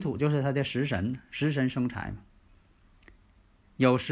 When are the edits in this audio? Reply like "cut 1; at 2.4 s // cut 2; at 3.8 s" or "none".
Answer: none